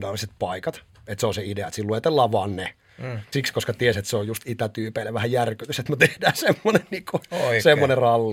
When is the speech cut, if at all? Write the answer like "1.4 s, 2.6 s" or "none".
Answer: 3.3 s